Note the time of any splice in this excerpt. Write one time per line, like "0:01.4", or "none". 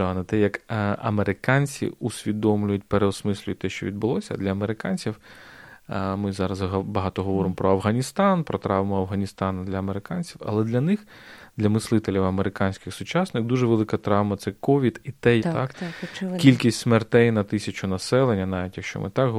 0:15.4